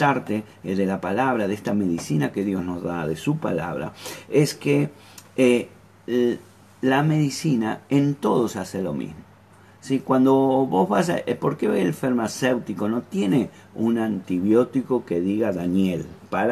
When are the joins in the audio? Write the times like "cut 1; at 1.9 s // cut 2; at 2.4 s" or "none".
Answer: none